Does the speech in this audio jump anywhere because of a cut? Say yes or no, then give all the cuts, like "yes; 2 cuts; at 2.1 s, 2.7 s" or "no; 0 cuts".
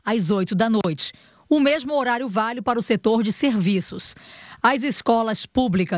no; 0 cuts